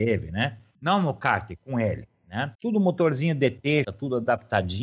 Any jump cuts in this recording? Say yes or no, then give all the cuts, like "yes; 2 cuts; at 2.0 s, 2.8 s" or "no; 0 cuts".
yes; 2 cuts; at 2.5 s, 3.8 s